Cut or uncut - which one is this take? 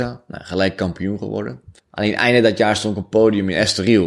cut